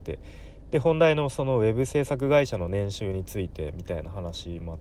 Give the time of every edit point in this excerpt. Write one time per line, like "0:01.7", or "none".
none